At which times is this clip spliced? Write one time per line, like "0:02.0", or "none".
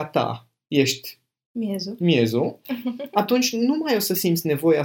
none